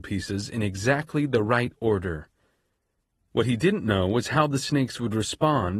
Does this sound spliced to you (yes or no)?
no